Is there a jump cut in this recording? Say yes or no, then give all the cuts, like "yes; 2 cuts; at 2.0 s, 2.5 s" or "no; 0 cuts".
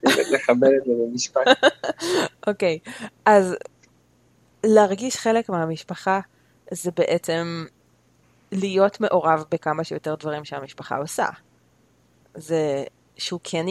no; 0 cuts